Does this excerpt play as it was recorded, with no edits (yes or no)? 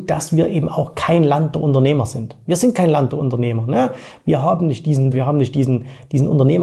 no